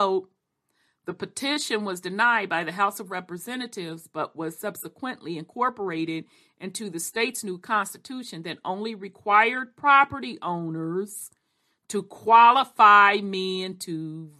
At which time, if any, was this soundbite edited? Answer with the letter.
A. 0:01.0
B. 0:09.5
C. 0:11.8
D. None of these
D